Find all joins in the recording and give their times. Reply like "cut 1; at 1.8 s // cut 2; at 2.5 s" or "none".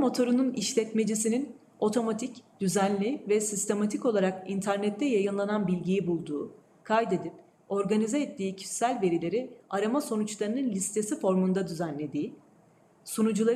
cut 1; at 6.8 s